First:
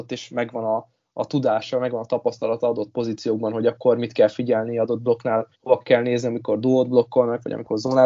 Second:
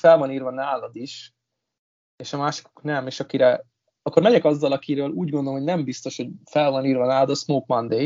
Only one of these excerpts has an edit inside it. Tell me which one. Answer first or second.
first